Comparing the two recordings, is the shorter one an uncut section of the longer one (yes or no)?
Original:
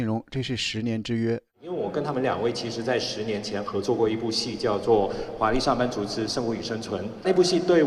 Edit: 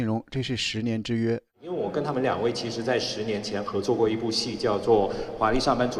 yes